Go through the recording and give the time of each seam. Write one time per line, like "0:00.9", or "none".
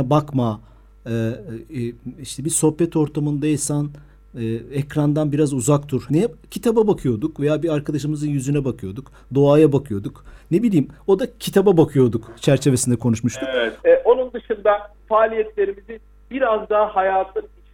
0:06.1
0:13.8